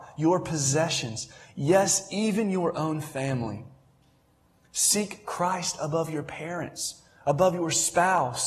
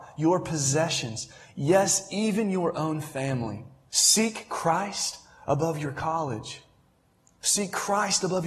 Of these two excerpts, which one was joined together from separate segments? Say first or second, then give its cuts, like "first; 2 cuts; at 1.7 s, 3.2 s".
second; 1 cut; at 3.9 s